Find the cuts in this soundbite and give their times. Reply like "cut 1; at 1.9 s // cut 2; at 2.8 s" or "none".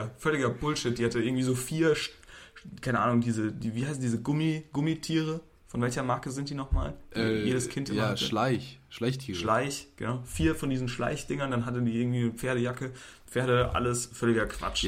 cut 1; at 13.2 s